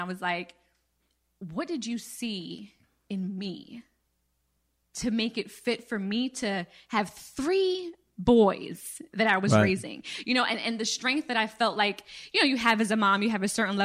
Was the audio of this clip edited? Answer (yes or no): no